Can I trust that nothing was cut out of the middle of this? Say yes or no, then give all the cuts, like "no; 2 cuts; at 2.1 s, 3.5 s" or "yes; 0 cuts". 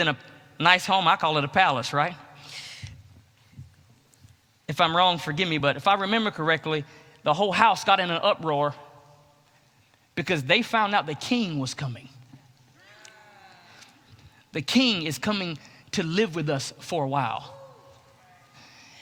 yes; 0 cuts